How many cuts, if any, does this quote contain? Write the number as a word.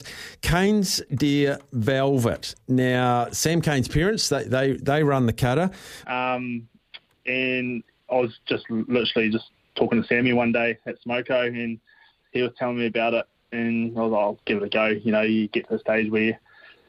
one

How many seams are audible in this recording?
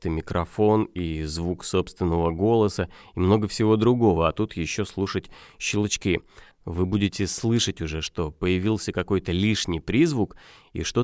one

